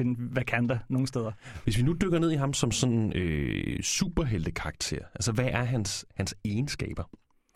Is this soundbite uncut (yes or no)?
no